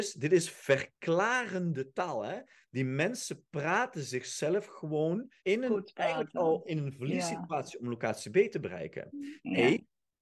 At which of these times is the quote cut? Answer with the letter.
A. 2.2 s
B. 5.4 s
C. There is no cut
B